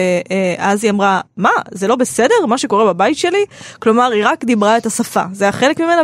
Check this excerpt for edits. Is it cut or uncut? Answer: uncut